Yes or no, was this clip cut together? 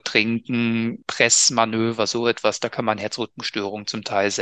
no